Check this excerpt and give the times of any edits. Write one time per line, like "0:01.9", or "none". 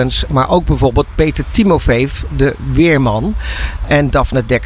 none